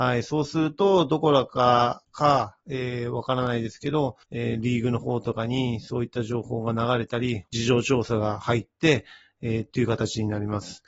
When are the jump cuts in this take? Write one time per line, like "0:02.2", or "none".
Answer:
0:04.2
0:07.5